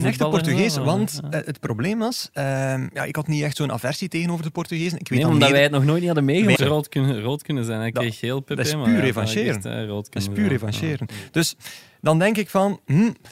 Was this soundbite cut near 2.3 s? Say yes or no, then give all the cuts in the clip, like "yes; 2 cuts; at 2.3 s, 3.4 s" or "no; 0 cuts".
no; 1 cut; at 6.6 s